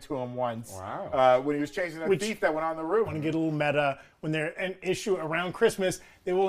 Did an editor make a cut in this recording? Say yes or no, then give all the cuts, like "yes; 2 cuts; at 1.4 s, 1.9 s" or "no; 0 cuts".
yes; 2 cuts; at 3.1 s, 4.5 s